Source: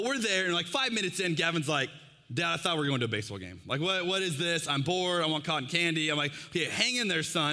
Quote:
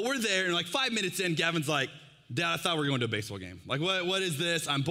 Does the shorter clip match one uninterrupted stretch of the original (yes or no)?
yes